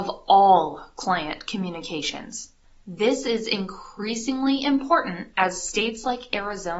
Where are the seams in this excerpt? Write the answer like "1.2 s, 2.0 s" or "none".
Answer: 2.8 s